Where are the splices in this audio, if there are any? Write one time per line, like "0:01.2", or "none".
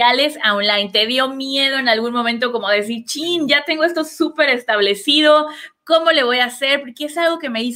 none